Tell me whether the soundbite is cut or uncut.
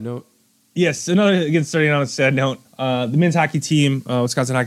cut